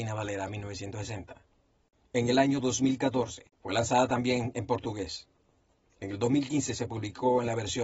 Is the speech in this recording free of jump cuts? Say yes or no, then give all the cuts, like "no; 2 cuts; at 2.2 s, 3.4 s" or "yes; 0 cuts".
yes; 0 cuts